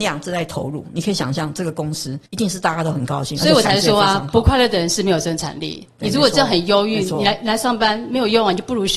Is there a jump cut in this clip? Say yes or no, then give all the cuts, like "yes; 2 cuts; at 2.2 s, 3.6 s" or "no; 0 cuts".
no; 0 cuts